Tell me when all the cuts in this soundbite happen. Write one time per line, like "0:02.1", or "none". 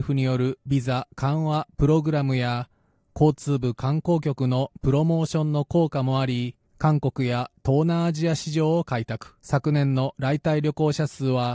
0:06.7
0:09.4